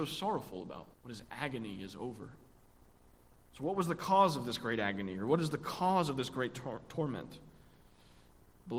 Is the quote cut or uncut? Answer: cut